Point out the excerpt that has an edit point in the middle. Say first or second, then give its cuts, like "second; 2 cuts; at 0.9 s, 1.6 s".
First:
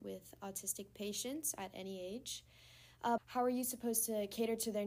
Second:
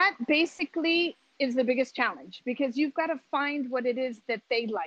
first; 1 cut; at 3.2 s